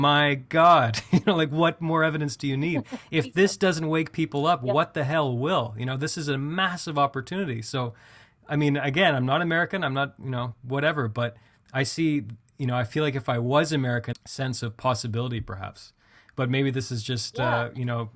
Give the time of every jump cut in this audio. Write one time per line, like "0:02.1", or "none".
0:14.1

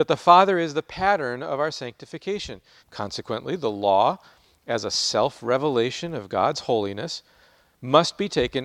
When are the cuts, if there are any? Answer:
0:02.8

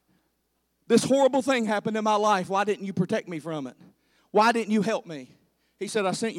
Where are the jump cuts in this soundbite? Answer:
none

